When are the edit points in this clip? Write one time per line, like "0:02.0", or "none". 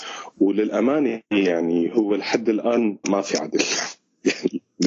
0:03.0